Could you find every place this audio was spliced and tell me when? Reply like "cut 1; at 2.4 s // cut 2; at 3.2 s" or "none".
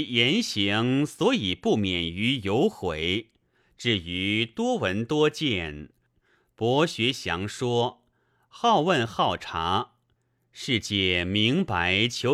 cut 1; at 3.6 s // cut 2; at 6.1 s